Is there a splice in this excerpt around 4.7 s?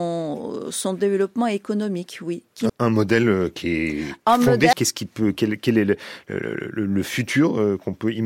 yes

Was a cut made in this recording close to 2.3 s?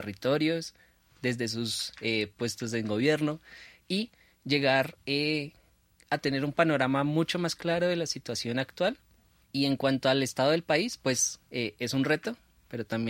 no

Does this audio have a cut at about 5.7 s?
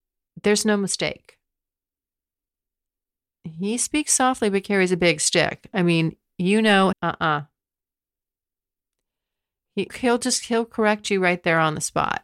no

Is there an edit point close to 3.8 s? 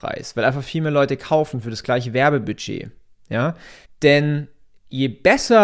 yes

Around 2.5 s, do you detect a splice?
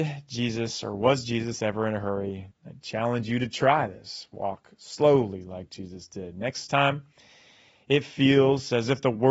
yes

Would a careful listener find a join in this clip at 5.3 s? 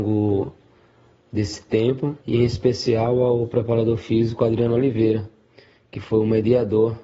no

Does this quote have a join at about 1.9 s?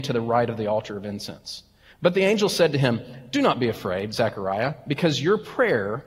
yes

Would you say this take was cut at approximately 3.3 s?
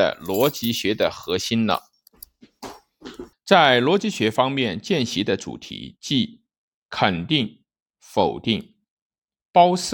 yes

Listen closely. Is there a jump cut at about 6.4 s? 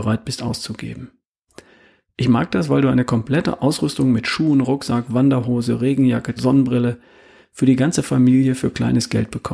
yes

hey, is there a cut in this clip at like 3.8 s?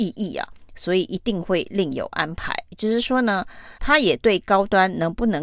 yes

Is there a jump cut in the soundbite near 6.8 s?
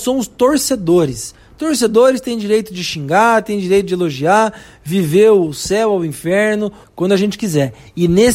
yes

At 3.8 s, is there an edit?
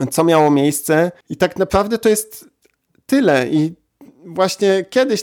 no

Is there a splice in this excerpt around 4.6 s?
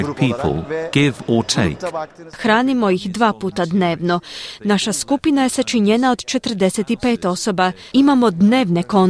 no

